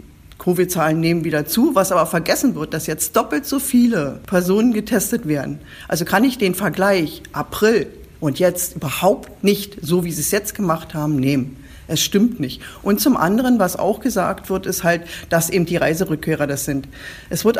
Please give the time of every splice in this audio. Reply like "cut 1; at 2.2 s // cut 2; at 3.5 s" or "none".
none